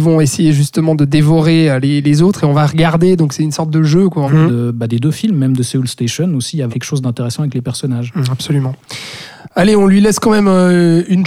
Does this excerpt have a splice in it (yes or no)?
yes